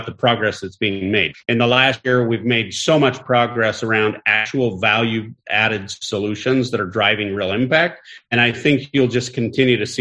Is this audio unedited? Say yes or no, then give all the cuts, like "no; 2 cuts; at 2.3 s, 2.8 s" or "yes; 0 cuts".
no; 1 cut; at 1.4 s